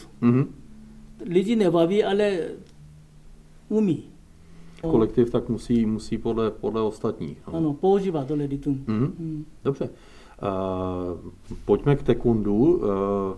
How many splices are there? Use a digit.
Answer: 1